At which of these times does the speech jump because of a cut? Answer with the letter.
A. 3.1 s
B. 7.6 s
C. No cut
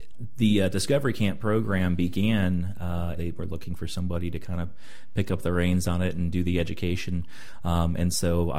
A